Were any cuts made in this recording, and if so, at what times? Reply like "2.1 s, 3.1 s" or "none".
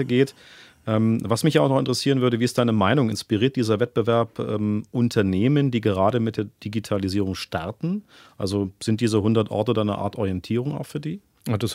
none